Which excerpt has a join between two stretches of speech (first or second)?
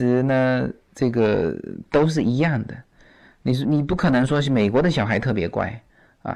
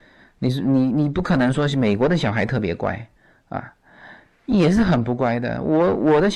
first